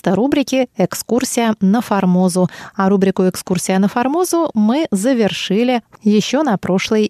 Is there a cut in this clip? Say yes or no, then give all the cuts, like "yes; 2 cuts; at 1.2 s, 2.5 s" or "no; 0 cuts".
no; 0 cuts